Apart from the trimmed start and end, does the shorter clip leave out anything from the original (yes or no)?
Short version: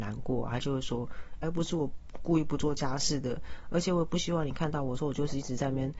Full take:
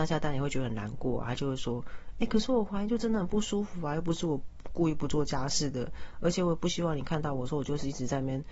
yes